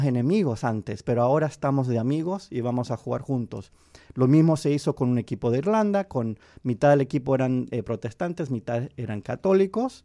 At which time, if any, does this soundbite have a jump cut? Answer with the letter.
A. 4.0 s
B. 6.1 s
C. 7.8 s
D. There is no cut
D